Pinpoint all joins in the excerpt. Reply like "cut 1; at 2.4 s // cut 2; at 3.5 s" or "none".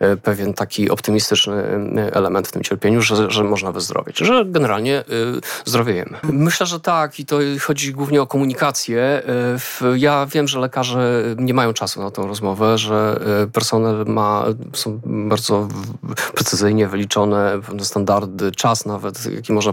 cut 1; at 6.2 s